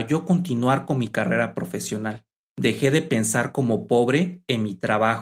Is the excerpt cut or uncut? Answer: uncut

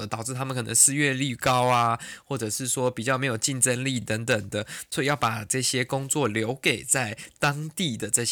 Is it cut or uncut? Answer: uncut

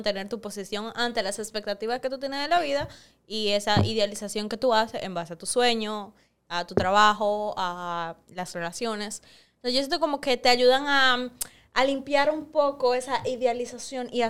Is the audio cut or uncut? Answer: uncut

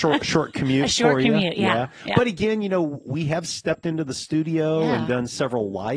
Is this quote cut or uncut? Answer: uncut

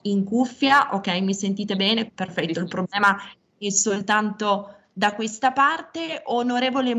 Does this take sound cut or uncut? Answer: cut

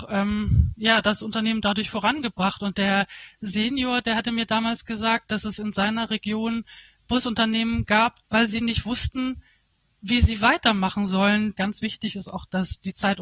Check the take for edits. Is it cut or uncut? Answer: cut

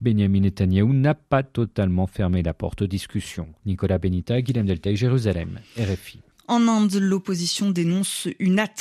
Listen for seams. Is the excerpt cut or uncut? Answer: cut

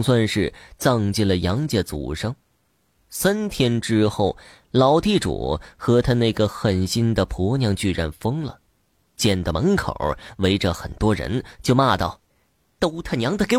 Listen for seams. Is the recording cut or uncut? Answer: cut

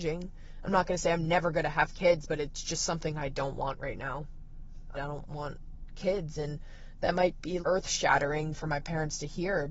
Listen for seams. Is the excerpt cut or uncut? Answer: cut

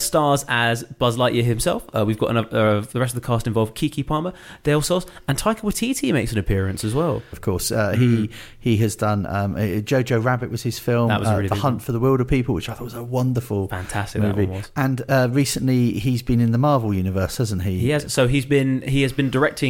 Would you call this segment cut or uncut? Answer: cut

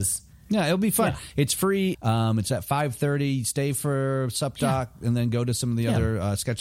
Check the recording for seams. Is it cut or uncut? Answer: cut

